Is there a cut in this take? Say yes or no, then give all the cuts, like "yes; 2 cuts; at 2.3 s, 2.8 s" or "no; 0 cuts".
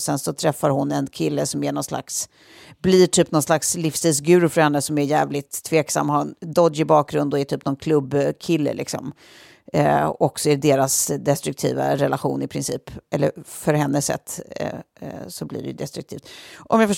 no; 0 cuts